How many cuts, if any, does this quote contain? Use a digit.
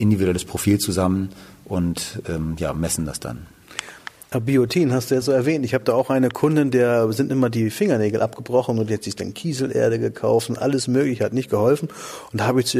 1